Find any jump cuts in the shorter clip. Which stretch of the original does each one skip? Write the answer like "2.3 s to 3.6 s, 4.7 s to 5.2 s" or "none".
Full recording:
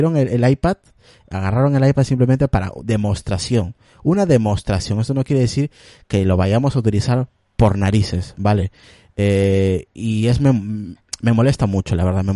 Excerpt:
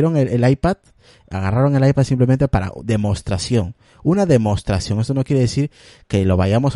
none